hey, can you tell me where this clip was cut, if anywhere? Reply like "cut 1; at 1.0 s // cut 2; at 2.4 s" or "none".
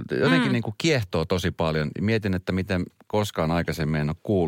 none